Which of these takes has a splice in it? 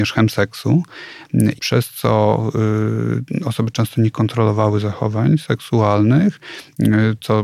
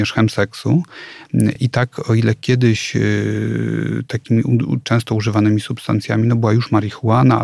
first; 1 cut; at 1.6 s

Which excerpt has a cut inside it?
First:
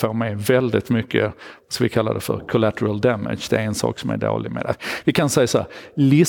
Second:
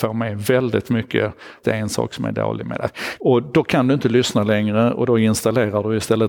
second; 2 cuts; at 1.6 s, 3.2 s

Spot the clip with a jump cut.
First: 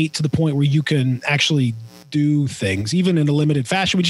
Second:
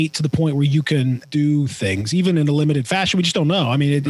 second; 1 cut; at 1.2 s

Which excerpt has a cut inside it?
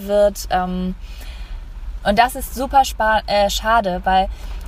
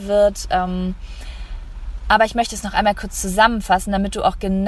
first; 1 cut; at 2.0 s

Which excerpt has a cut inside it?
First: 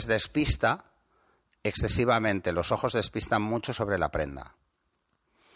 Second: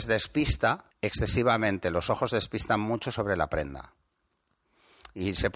second; 1 cut; at 0.9 s

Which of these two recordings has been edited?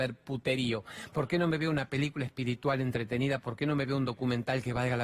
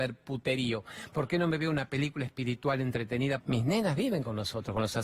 second; 1 cut; at 3.4 s

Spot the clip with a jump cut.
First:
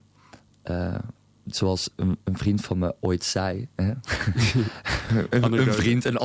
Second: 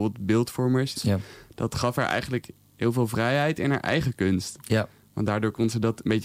second; 1 cut; at 0.9 s

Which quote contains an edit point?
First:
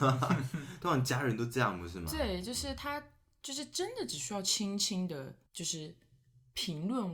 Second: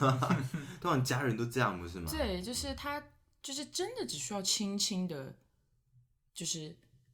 first; 1 cut; at 5.5 s

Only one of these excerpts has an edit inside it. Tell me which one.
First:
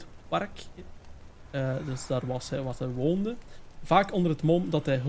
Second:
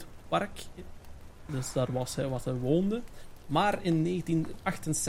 second; 2 cuts; at 1.5 s, 3.4 s

